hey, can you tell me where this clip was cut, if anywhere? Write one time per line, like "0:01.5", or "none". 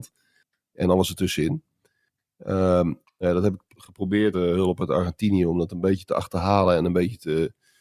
0:03.0
0:04.3

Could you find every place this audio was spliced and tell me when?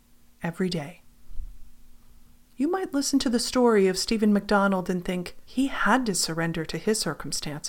0:02.4
0:05.4

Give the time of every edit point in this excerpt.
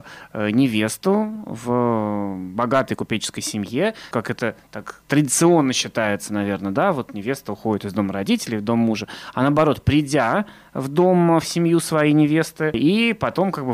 0:04.1

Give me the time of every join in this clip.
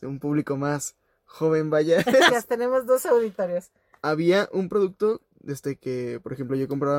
0:02.3

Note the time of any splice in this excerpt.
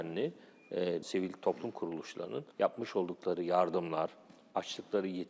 0:01.0
0:02.5

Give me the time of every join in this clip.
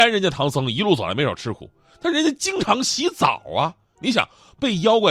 none

